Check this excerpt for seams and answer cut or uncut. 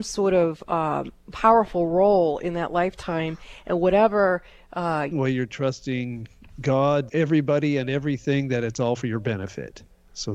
cut